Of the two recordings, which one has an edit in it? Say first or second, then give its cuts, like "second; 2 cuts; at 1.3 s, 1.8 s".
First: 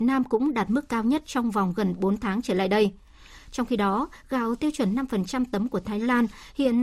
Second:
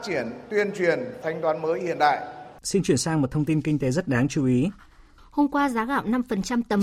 second; 3 cuts; at 1.2 s, 2.6 s, 5.2 s